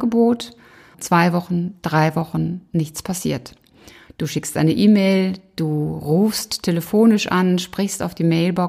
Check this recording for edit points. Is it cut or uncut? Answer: cut